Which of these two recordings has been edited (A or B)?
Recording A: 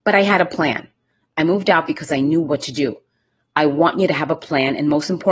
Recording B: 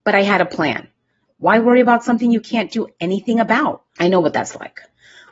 B